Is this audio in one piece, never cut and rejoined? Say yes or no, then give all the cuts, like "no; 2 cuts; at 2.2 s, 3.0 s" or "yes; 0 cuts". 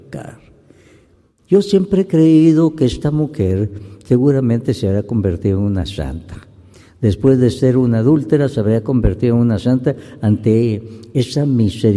yes; 0 cuts